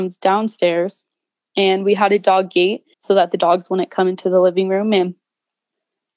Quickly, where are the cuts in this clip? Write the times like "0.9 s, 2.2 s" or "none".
2.9 s